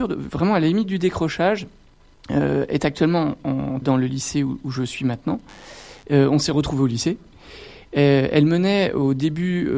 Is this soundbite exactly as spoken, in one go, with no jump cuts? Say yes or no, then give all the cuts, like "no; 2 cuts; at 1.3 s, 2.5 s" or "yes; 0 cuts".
no; 1 cut; at 3.8 s